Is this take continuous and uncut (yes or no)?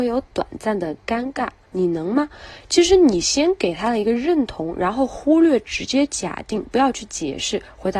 no